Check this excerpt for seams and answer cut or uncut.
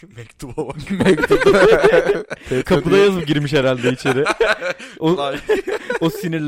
uncut